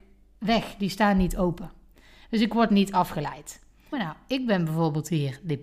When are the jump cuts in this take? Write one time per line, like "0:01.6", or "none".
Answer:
0:03.9